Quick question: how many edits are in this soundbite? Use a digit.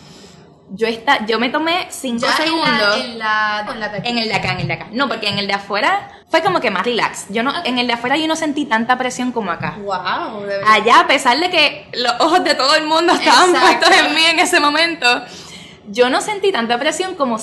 2